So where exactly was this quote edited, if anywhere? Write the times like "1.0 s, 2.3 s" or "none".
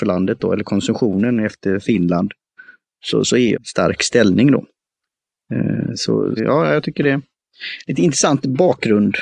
3.5 s, 6.4 s